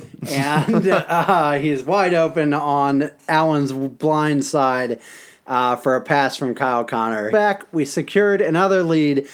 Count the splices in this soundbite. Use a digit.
1